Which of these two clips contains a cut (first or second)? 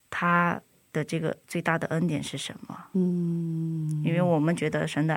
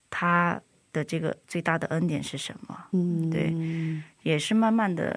second